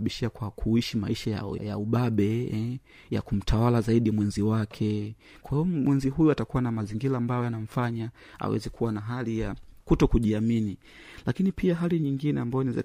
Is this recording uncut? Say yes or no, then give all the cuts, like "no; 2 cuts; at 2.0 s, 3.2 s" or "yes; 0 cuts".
no; 1 cut; at 1.6 s